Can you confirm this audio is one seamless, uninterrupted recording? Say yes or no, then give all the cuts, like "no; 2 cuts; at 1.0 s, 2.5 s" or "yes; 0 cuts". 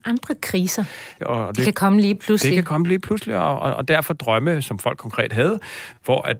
no; 1 cut; at 1.2 s